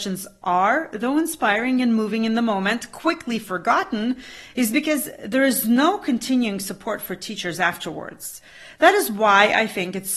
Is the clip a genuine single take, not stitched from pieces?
yes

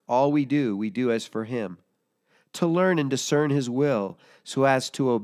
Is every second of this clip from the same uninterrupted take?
yes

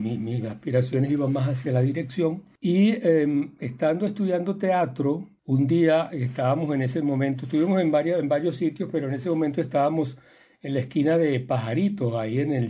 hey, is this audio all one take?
yes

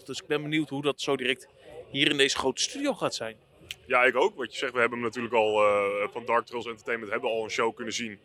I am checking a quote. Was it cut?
no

